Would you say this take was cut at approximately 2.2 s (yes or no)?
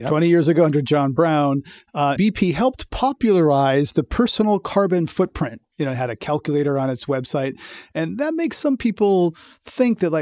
yes